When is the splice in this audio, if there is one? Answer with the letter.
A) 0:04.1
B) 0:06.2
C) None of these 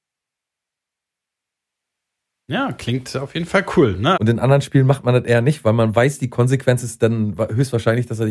A